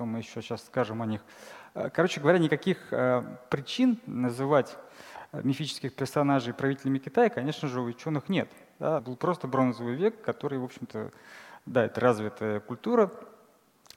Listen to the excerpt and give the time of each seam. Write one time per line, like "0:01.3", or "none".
0:09.0